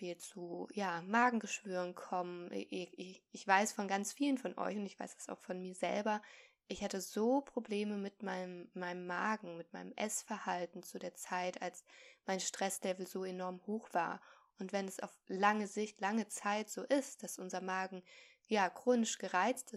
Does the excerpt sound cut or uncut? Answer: uncut